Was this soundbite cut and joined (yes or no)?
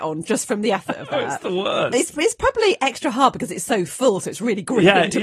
no